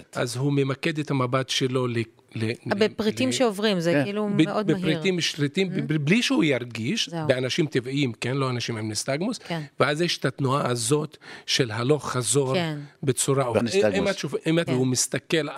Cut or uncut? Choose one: cut